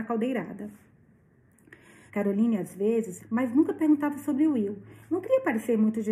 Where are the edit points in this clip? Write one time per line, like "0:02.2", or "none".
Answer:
0:02.1
0:03.2